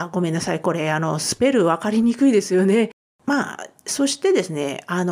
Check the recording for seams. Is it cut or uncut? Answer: cut